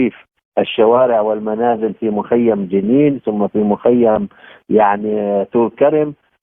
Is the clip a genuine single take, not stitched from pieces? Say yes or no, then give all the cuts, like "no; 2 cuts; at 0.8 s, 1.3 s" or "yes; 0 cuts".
yes; 0 cuts